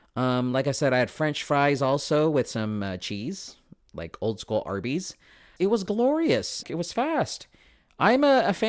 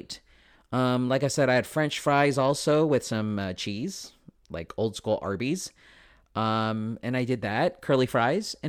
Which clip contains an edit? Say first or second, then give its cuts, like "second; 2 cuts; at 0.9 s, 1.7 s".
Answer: first; 2 cuts; at 5.6 s, 6.6 s